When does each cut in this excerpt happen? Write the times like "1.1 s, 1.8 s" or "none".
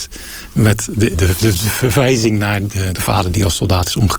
1.1 s, 2.9 s